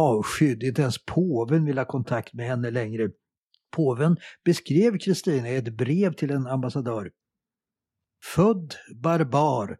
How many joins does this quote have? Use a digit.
0